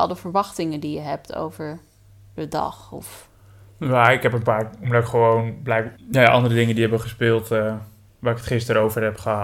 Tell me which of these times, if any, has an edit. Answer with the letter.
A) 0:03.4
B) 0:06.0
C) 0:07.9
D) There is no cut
B